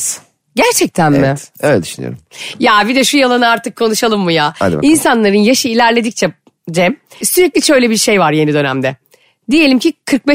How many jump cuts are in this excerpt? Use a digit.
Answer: 1